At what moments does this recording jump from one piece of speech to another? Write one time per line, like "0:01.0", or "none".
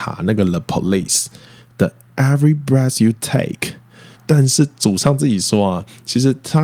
0:04.2